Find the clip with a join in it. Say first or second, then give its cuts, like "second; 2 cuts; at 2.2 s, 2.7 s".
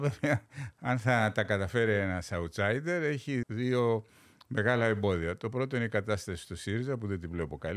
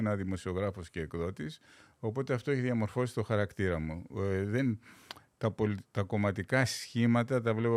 first; 1 cut; at 3.4 s